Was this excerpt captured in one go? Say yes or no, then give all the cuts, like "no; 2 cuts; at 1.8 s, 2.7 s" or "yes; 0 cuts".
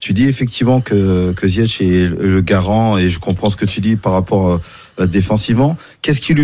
yes; 0 cuts